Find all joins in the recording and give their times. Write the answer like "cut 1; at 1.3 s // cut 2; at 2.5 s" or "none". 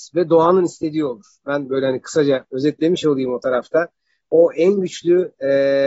none